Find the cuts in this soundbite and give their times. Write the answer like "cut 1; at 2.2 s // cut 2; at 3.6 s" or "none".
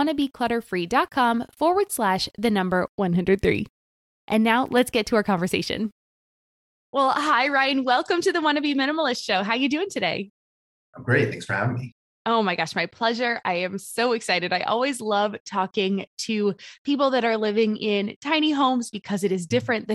none